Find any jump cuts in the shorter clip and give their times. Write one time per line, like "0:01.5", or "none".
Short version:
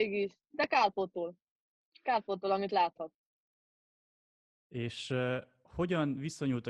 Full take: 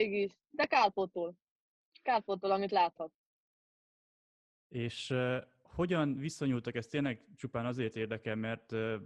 none